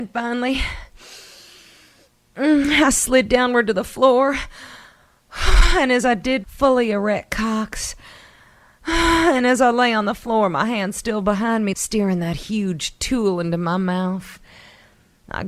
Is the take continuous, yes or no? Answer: no